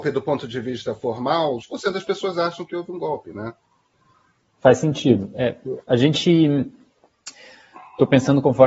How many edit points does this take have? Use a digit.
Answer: 1